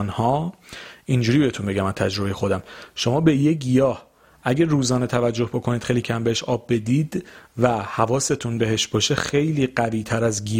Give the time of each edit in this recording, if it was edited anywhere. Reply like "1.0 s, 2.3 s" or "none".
6.0 s